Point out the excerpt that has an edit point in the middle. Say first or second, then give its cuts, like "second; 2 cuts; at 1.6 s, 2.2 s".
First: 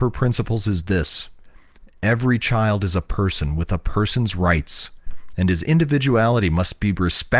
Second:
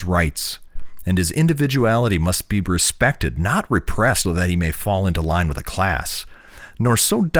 second; 1 cut; at 4.2 s